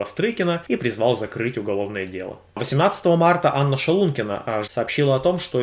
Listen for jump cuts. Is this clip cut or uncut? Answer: cut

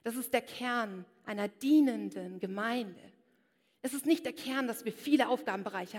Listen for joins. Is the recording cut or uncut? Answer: uncut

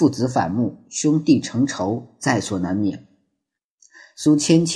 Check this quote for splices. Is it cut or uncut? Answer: cut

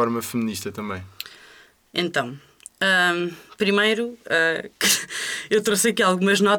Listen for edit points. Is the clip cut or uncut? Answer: uncut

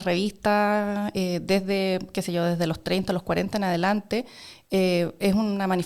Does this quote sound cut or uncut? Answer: uncut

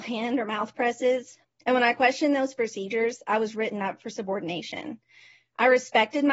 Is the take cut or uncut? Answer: cut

